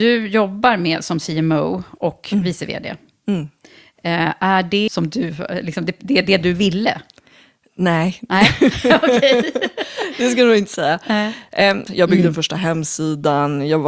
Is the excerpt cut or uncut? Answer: cut